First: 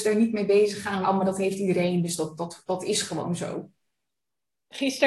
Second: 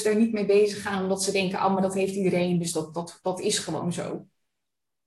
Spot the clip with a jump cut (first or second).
first